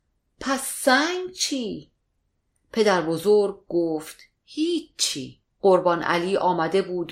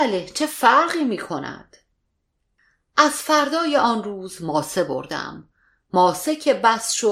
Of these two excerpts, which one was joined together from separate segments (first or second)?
first